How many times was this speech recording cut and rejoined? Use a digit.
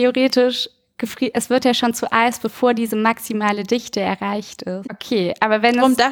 2